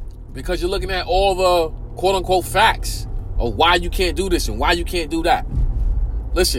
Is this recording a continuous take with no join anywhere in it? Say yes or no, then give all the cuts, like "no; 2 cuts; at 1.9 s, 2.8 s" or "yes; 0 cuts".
yes; 0 cuts